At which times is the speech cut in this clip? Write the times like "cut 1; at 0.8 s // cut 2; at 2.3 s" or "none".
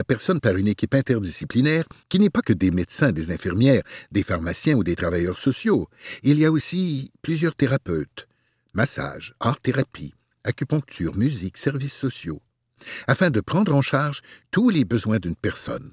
cut 1; at 2.0 s